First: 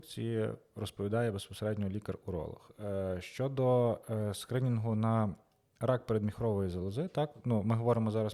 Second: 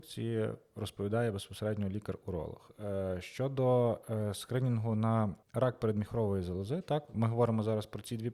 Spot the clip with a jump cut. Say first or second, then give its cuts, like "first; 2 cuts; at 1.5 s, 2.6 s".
second; 2 cuts; at 5.4 s, 7.1 s